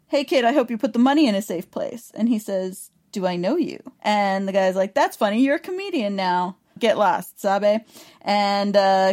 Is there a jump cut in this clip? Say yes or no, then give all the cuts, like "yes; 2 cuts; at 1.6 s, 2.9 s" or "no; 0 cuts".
yes; 2 cuts; at 4.0 s, 6.8 s